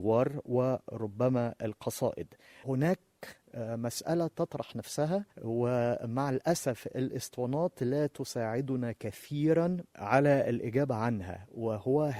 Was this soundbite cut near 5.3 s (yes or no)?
yes